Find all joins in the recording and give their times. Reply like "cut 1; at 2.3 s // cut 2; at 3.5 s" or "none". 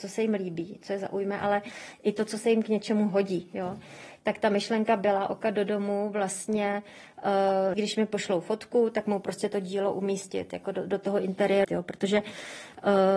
cut 1; at 7.7 s // cut 2; at 11.6 s